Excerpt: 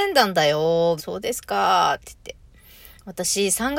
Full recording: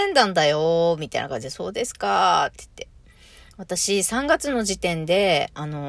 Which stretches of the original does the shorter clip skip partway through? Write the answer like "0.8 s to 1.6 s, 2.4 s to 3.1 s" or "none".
1.0 s to 1.5 s